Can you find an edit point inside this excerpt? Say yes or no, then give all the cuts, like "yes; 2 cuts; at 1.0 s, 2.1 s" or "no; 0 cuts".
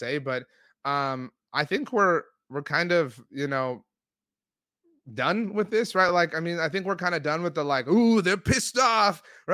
no; 0 cuts